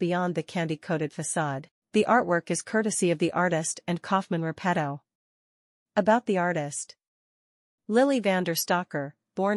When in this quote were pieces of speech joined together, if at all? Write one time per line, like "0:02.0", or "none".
0:01.8